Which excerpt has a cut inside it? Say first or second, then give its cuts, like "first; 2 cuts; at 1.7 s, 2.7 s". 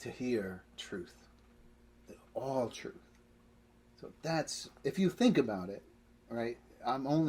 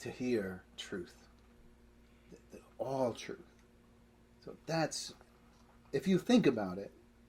first; 2 cuts; at 2.1 s, 4.8 s